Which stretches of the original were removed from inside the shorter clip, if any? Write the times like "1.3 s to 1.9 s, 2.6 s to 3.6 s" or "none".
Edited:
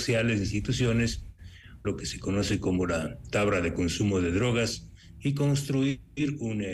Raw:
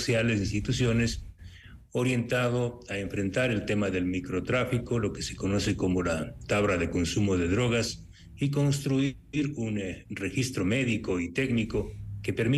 1.8 s to 5.0 s